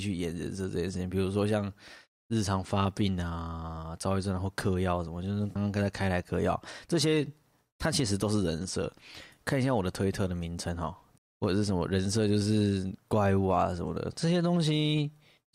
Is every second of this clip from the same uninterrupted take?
no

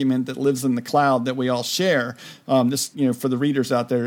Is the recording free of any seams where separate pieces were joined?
no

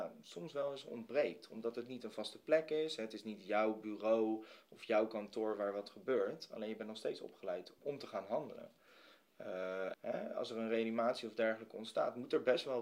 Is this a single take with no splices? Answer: no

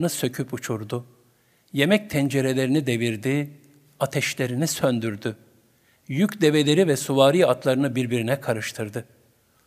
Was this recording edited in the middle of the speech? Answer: no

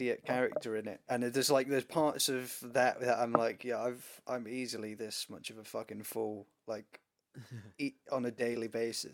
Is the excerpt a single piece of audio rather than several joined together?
yes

